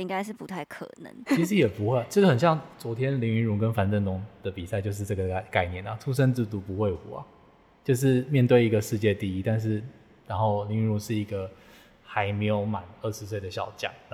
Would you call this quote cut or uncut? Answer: cut